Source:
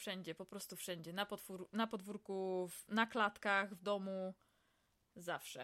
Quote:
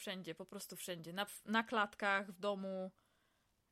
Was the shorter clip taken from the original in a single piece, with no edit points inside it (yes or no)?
no